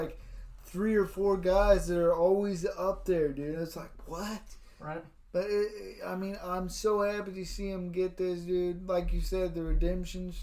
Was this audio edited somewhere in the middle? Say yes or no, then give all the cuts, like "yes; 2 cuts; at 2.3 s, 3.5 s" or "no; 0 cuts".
no; 0 cuts